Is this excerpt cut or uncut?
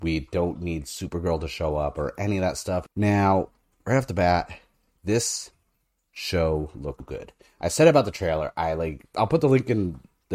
cut